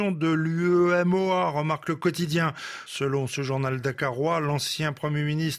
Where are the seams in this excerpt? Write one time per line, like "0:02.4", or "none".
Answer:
none